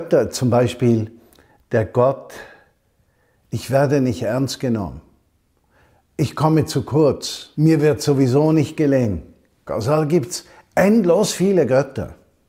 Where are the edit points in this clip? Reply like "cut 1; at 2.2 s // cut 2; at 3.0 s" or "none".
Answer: cut 1; at 7.5 s // cut 2; at 9.7 s